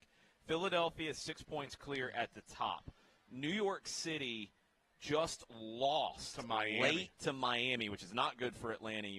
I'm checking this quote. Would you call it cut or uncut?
uncut